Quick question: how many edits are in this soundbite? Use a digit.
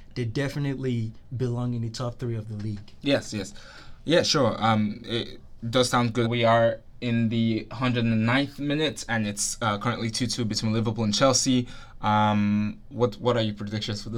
1